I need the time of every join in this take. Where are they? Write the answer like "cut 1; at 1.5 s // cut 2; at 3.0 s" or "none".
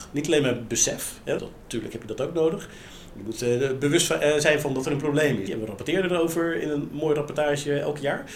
cut 1; at 1.4 s // cut 2; at 5.5 s